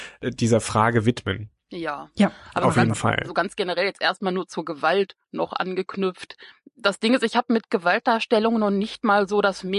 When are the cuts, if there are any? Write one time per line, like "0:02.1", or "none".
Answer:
0:05.2